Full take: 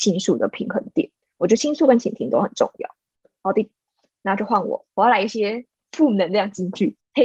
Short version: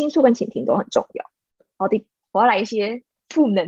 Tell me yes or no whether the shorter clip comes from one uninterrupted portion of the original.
no